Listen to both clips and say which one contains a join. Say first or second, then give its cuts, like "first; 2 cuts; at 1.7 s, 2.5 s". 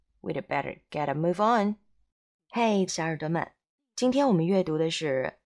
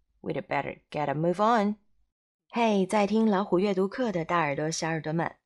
first; 1 cut; at 2.9 s